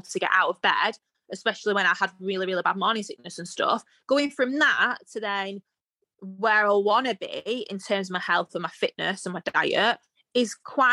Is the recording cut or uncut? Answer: uncut